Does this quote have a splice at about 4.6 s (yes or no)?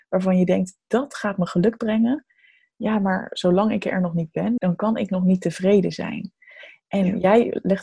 yes